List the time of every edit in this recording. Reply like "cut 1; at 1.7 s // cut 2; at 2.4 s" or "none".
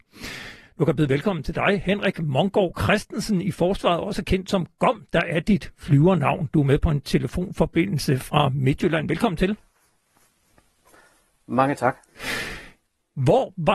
none